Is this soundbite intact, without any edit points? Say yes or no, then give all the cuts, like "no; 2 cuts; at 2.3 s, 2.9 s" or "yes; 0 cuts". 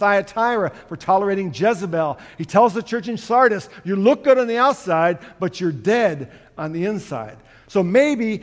yes; 0 cuts